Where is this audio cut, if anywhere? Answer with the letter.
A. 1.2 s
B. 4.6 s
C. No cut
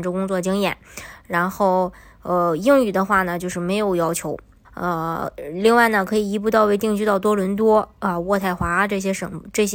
B